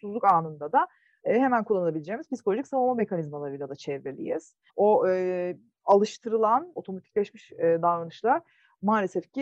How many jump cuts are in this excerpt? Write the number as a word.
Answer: two